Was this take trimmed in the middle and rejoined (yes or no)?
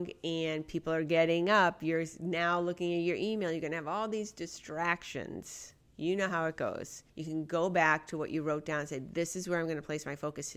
no